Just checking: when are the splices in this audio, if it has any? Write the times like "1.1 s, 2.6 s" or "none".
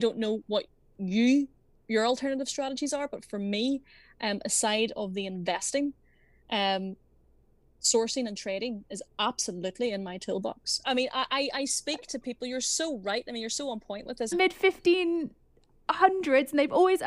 10.8 s, 14.3 s

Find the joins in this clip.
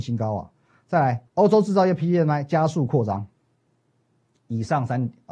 1.3 s

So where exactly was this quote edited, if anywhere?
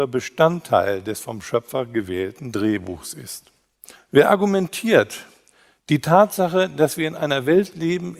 4.0 s

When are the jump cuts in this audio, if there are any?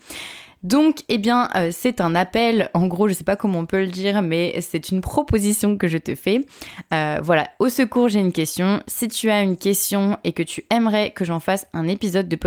none

